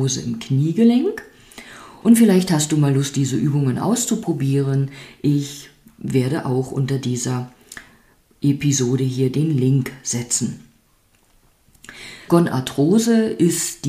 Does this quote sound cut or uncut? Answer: cut